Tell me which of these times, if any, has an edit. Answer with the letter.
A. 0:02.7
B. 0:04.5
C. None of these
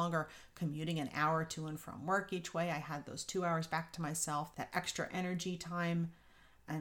B